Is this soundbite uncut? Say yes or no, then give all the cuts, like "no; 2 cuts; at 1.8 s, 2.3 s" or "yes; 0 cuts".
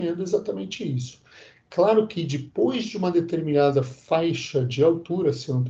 yes; 0 cuts